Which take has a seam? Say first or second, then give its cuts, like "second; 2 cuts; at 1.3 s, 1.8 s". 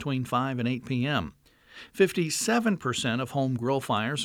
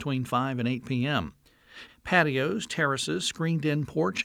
second; 1 cut; at 1.9 s